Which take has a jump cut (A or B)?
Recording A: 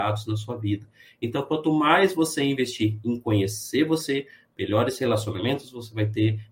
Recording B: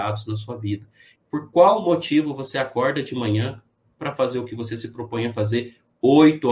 B